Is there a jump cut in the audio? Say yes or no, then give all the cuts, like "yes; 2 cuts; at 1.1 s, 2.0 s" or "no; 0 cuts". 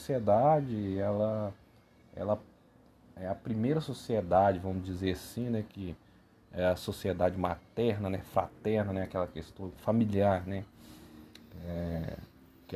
no; 0 cuts